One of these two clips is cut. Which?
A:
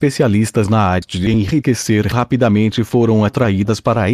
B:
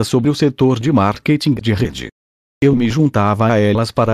B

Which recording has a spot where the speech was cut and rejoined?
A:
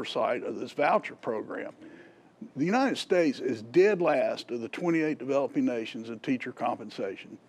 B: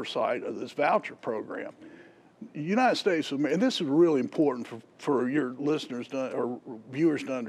A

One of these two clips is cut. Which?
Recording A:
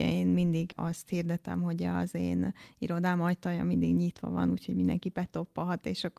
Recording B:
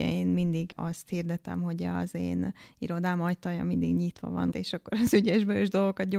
B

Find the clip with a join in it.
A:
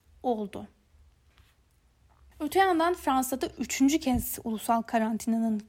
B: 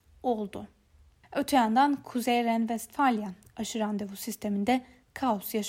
B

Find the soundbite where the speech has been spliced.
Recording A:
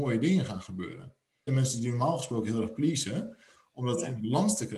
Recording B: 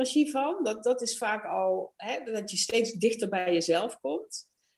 A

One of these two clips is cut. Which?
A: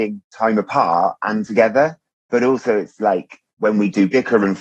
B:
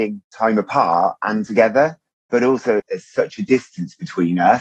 B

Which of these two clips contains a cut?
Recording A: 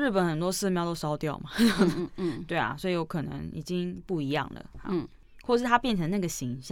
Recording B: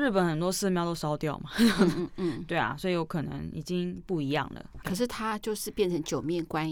B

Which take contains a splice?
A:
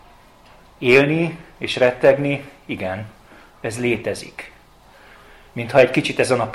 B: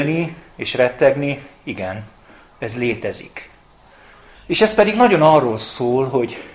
B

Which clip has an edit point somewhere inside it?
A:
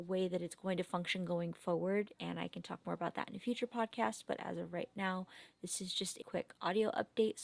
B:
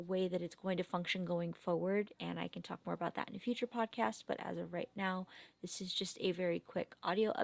A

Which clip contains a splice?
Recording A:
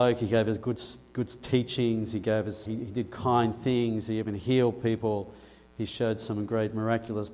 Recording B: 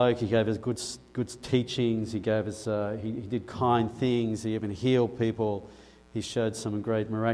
A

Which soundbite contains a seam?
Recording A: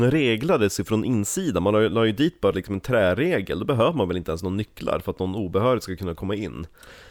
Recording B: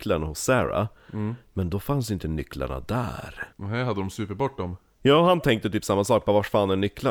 B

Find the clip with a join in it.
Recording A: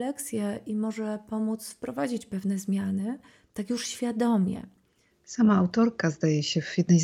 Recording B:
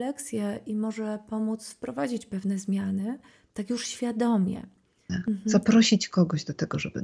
B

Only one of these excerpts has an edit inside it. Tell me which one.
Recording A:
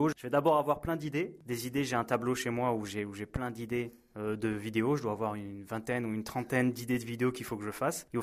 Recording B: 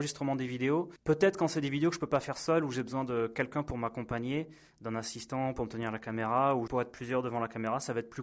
B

